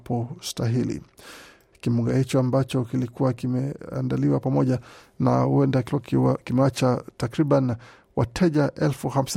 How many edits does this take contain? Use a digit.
1